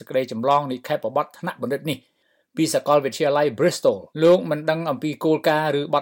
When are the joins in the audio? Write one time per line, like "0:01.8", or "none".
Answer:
0:04.1